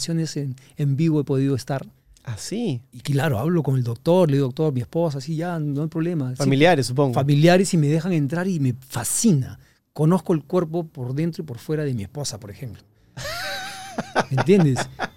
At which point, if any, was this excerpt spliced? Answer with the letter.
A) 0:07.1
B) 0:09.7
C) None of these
C